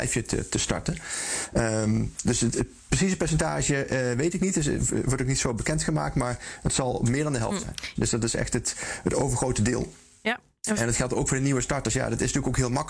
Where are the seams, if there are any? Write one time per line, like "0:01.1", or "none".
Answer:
0:08.0

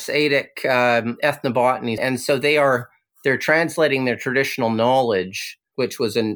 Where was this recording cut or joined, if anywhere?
0:02.0

